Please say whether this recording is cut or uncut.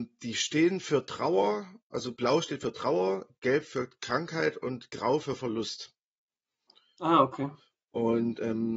uncut